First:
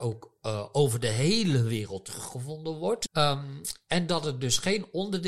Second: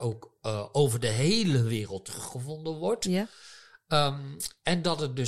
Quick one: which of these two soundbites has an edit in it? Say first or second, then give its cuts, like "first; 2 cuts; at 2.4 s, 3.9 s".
first; 1 cut; at 3.1 s